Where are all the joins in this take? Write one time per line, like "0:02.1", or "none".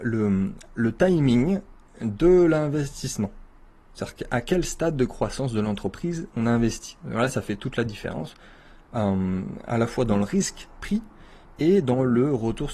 none